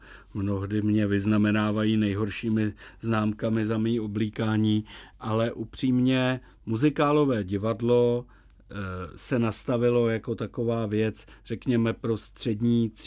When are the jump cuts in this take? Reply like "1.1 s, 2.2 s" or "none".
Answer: none